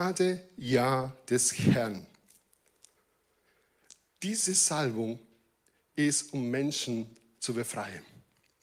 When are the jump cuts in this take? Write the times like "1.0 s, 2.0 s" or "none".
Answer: none

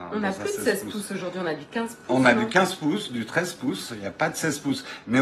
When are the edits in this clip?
none

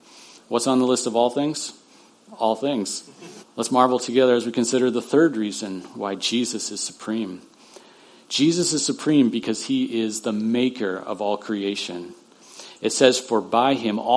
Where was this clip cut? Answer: 3.4 s

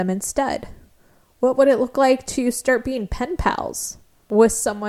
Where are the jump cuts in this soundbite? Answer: none

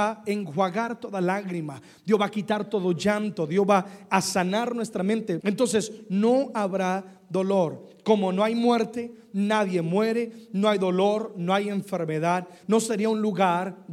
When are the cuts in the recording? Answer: 5.4 s, 12.6 s

